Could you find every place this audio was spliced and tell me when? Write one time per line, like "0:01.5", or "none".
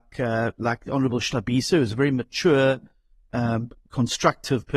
none